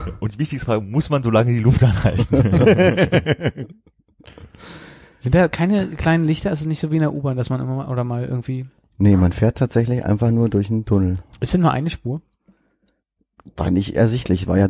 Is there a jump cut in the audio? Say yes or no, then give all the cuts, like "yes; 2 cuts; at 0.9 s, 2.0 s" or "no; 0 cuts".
no; 0 cuts